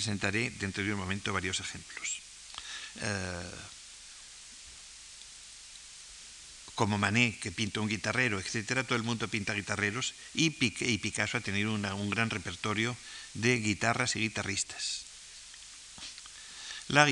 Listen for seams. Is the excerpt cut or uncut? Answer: cut